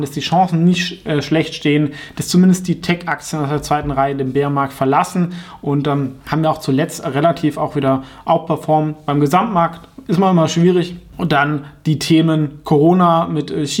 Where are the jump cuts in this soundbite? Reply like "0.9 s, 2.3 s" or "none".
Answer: none